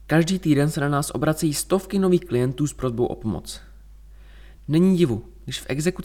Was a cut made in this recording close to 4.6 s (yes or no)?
no